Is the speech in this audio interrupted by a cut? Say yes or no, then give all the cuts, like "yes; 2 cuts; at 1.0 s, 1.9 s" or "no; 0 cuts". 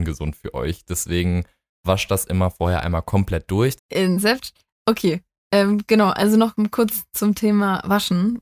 yes; 1 cut; at 3.8 s